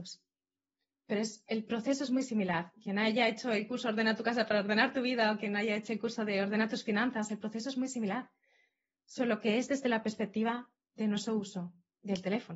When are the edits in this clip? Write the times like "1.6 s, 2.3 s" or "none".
none